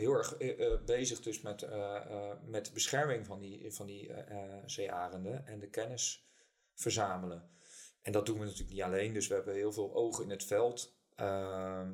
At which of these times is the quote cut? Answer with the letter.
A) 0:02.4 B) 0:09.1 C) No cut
C